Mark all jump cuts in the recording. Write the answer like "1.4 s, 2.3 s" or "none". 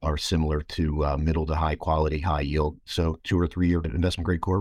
2.9 s